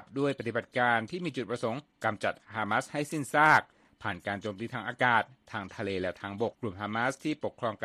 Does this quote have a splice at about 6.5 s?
yes; 1 cut; at 6.5 s

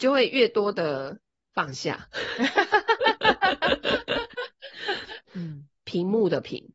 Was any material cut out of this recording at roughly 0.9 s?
no; 1 cut; at 5.3 s

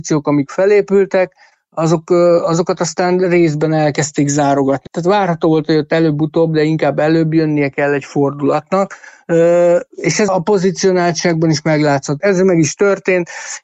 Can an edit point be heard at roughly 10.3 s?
yes; 3 cuts; at 4.9 s, 10.3 s, 12.2 s

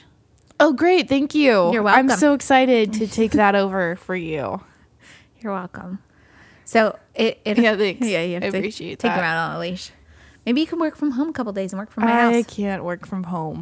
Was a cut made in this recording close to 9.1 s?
no; 1 cut; at 7.5 s

